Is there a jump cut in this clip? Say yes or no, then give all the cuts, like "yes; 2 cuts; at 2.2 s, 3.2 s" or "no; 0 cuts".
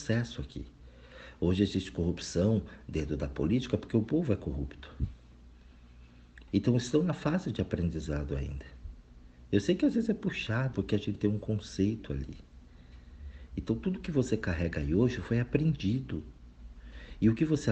yes; 2 cuts; at 6.5 s, 10.7 s